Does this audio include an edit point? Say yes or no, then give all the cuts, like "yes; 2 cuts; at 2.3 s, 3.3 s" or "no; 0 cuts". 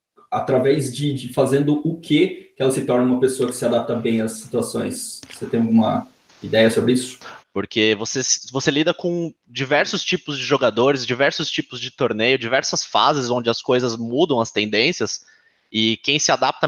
yes; 1 cut; at 7.4 s